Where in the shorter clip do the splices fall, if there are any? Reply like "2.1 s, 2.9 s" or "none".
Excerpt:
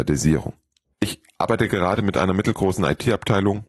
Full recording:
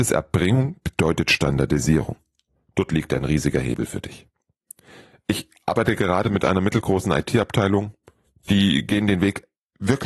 0.9 s